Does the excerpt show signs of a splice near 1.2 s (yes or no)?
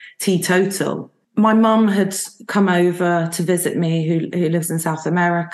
yes